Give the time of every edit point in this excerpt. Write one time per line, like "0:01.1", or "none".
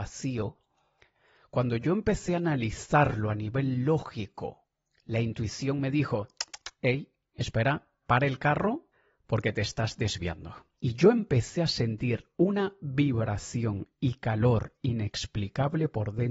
0:08.0
0:10.7